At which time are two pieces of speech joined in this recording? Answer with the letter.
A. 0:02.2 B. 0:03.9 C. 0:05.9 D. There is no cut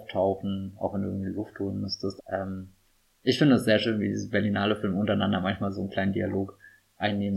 A